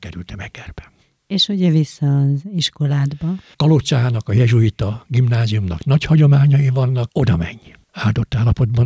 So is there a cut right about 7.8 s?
yes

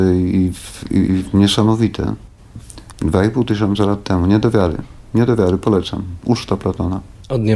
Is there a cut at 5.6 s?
no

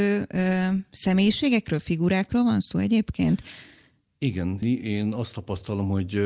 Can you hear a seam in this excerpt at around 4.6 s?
yes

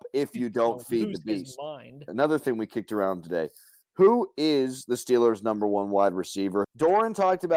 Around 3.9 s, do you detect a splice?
no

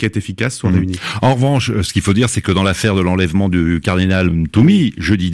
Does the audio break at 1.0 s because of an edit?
no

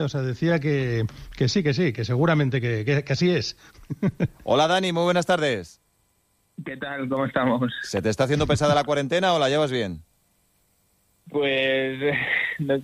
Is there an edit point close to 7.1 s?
no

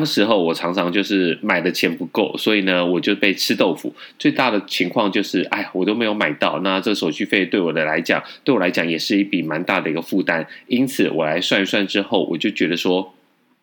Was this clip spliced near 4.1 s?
no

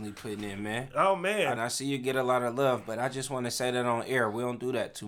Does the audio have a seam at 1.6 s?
yes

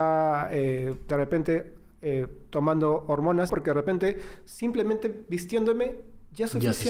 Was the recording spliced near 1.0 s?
no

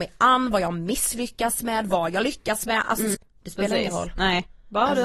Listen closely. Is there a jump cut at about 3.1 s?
yes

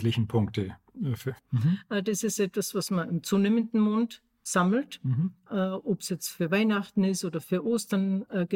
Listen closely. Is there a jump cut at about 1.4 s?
yes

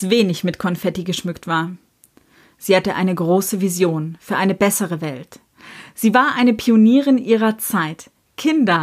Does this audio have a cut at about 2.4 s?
no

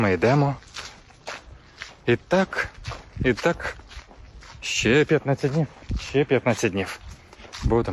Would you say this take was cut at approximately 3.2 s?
no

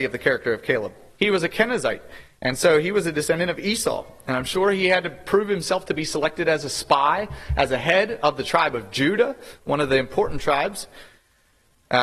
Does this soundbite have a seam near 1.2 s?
yes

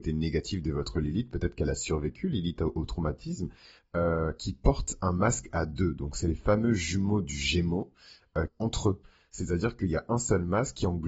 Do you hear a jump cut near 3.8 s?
yes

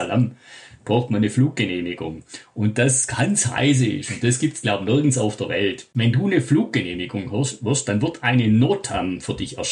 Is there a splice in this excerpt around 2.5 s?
no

